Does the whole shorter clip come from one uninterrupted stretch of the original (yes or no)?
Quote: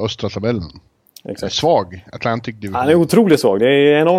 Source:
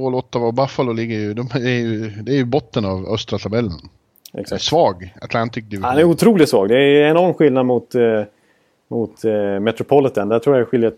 yes